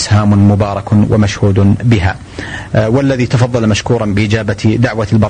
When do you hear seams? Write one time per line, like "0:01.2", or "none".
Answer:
0:02.7